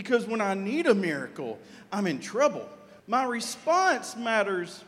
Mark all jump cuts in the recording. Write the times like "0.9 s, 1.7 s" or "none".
3.0 s